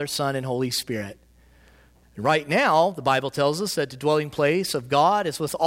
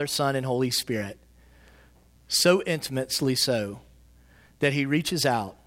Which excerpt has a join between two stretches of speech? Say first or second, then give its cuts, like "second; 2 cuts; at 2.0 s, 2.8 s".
first; 1 cut; at 2.0 s